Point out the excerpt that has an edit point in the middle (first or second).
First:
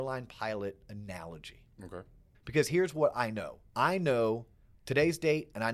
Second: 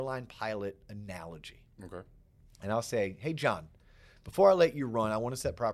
first